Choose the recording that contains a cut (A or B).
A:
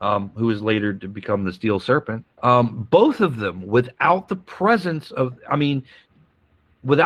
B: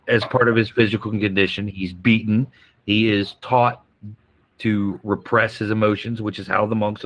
A